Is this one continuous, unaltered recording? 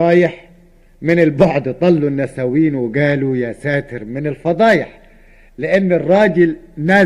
yes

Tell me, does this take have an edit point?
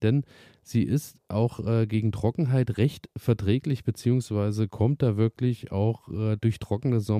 no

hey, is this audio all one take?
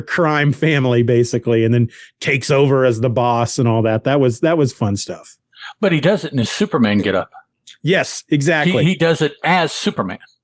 yes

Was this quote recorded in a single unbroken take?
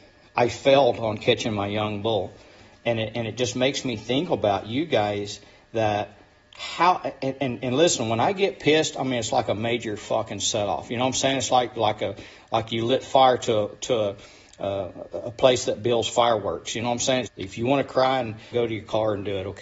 no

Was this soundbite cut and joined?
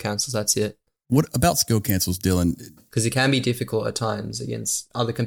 yes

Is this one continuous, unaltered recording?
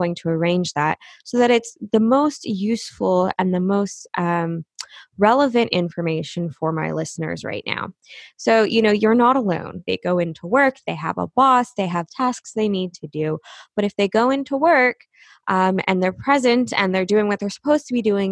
no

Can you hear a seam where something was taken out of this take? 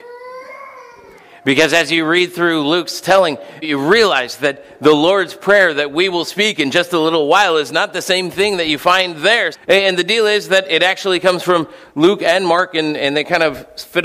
yes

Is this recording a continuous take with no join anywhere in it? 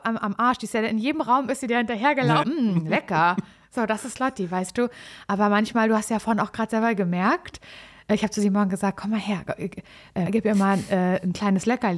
no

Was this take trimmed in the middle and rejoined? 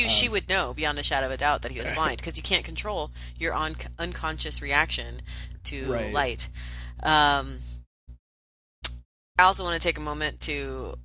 no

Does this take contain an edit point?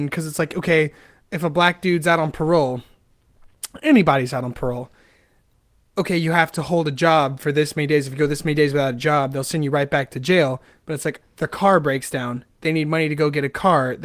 yes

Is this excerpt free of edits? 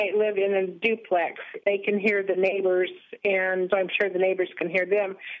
no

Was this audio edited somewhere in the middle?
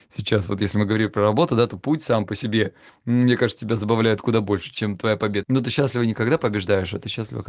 yes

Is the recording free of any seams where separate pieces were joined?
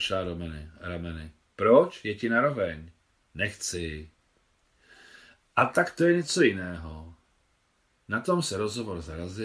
yes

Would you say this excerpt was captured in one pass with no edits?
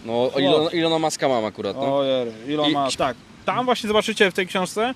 no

